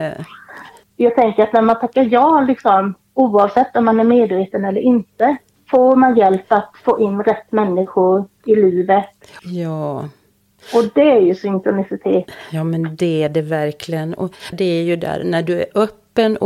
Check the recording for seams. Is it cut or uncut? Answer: cut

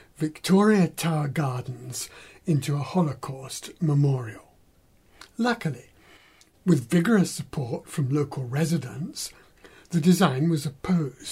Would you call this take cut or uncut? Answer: uncut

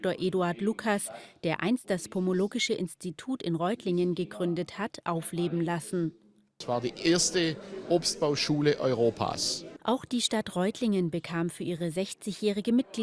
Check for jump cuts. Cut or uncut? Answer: cut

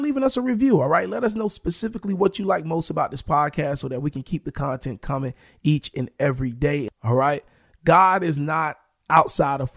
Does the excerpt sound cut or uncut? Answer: cut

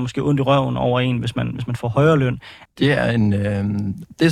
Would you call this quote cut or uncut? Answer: cut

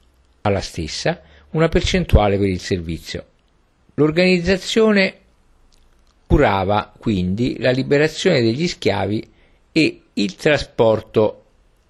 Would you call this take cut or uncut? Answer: uncut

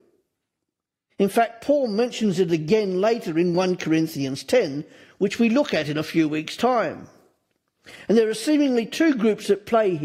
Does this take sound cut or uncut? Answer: cut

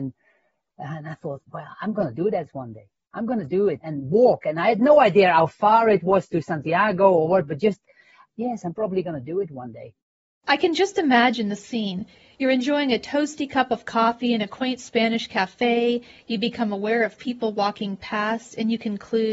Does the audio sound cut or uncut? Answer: uncut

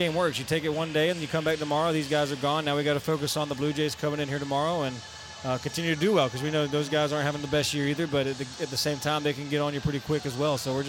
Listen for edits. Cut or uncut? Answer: uncut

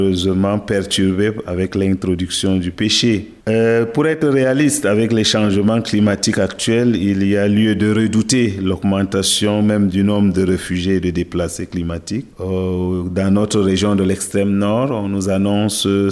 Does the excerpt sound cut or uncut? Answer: cut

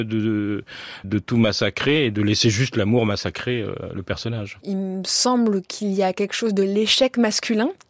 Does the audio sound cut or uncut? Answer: cut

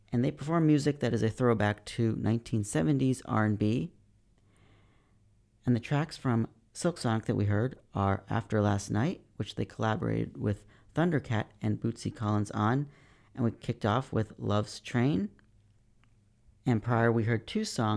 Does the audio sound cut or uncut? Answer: cut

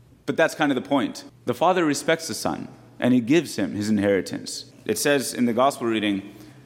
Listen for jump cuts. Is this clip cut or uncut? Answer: cut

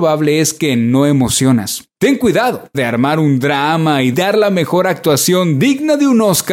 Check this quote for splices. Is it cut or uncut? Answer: cut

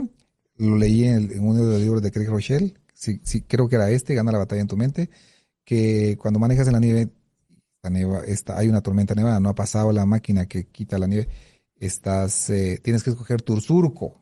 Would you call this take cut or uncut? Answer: uncut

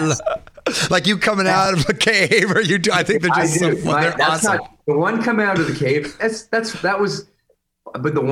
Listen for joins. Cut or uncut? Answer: uncut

